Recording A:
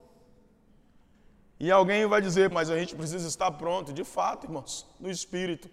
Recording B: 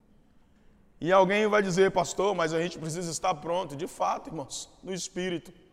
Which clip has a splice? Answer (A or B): A